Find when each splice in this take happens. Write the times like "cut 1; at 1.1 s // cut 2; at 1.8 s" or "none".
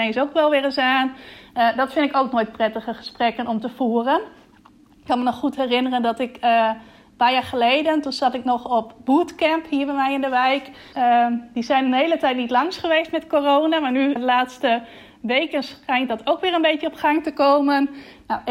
cut 1; at 10.9 s // cut 2; at 14.2 s